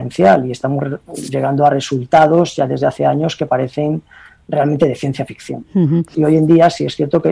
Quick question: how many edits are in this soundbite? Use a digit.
1